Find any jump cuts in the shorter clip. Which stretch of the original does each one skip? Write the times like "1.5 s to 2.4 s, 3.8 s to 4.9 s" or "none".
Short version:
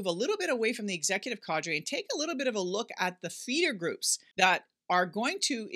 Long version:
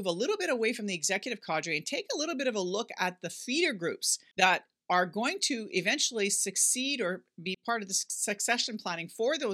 none